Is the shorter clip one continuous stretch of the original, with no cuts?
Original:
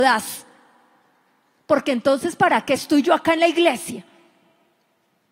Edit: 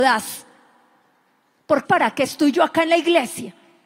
no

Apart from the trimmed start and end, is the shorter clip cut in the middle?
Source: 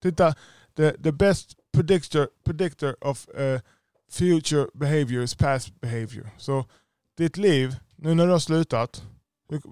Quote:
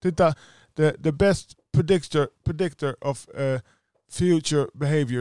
no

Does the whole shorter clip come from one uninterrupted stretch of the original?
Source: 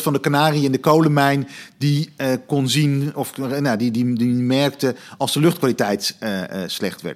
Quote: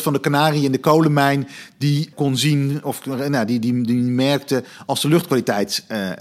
no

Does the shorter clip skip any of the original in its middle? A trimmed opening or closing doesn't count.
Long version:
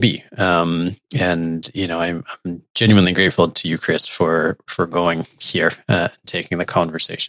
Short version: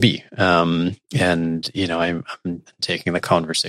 yes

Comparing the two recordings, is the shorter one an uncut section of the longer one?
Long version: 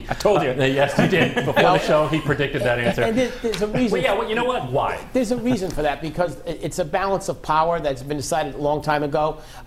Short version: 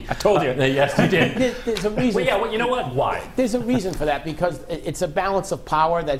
no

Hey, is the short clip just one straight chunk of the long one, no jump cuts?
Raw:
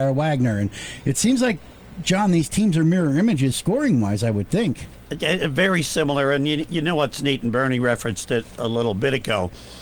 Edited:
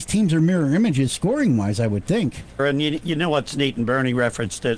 no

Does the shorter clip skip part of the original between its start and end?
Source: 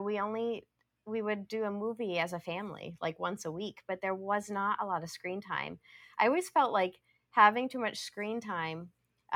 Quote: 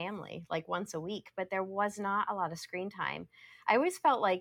no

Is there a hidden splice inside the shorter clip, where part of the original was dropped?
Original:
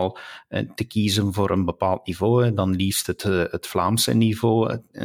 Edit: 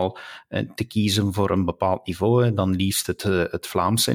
no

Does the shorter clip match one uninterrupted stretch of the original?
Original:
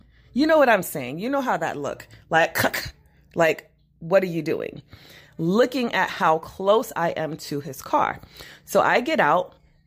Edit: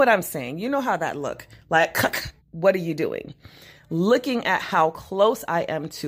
no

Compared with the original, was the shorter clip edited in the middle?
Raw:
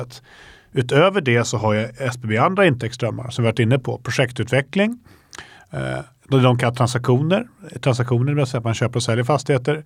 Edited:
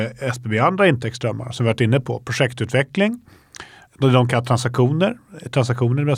yes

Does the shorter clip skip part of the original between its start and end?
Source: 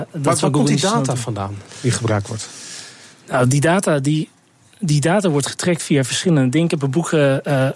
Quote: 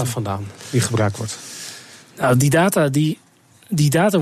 no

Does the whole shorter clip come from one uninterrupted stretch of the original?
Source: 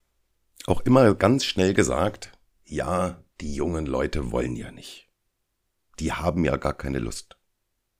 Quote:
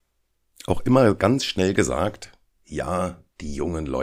yes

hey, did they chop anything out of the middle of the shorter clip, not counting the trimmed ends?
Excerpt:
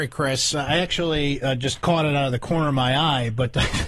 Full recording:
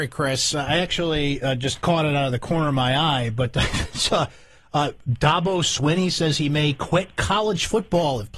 no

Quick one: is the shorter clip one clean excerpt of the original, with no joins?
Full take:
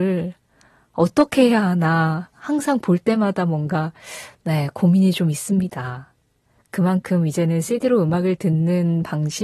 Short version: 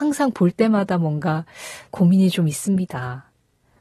no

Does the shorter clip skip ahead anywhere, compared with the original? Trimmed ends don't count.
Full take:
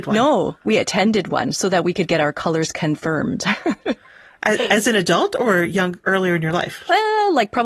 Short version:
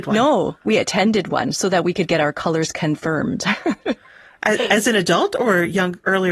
no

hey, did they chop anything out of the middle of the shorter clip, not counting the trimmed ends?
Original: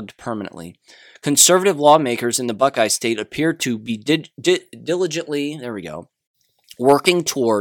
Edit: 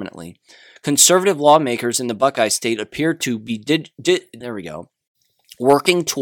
yes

